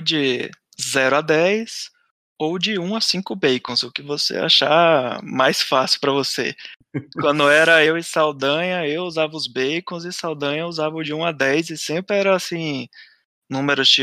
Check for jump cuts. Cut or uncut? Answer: uncut